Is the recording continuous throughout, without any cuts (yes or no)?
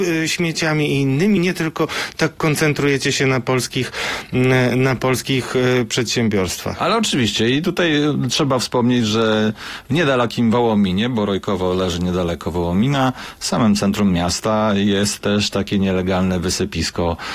yes